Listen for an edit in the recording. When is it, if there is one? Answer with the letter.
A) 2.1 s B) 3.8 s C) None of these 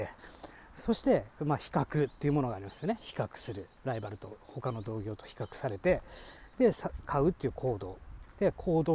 B